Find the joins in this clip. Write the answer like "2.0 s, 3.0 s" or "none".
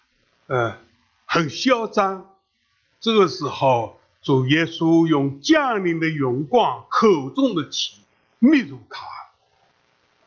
none